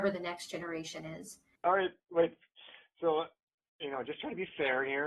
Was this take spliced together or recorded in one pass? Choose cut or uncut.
cut